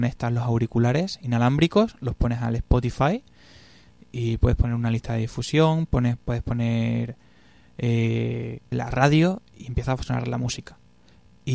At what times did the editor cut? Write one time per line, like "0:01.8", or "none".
0:08.7